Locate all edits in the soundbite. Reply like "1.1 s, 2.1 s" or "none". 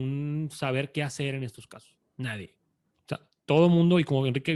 none